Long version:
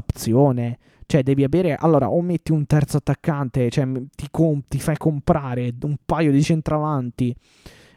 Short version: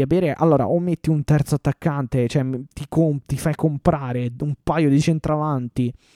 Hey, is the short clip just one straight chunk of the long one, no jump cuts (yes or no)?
yes